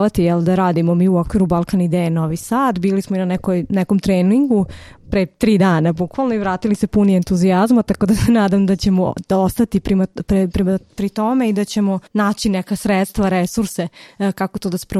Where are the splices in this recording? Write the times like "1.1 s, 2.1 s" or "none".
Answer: 12.1 s

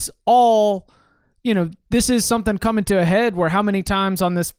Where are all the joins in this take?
none

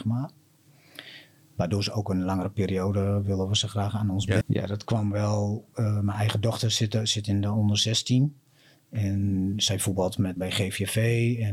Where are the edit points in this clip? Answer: 4.4 s, 10.4 s

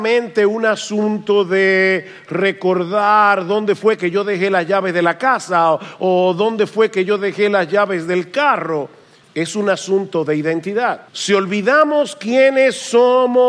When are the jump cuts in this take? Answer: 9.2 s, 11.1 s

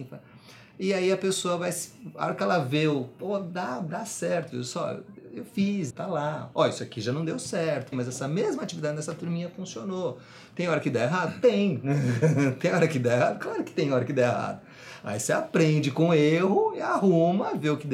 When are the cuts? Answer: 5.9 s, 7.9 s

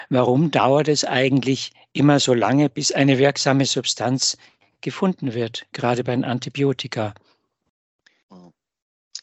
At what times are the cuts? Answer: none

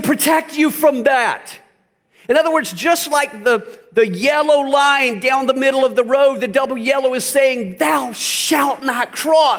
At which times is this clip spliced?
none

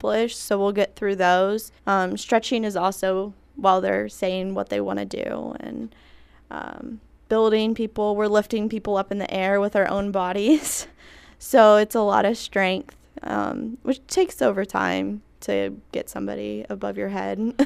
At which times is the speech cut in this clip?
1.8 s

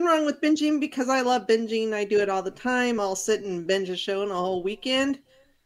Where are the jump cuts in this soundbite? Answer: none

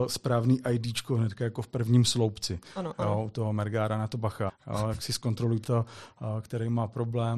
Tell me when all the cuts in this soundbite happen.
4.5 s, 5.6 s

